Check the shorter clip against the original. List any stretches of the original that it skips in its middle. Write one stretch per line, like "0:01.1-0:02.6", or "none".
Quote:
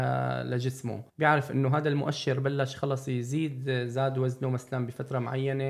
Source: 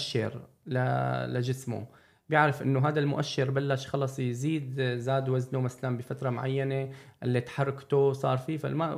0:01.9-0:02.2